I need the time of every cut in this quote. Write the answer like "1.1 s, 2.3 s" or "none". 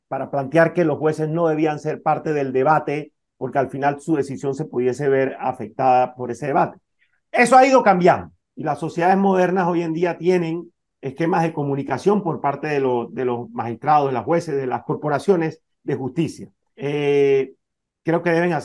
16.7 s